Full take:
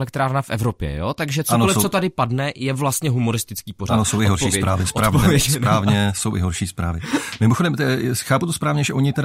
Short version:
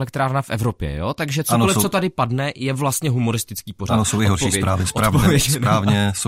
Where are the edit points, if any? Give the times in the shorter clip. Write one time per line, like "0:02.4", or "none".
none